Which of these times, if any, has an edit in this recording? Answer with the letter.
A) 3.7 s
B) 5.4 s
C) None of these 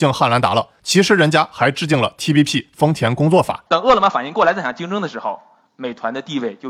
A